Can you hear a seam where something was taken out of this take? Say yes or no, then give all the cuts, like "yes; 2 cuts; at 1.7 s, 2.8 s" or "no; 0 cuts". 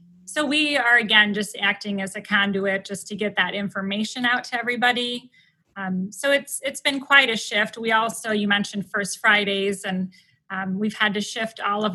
no; 0 cuts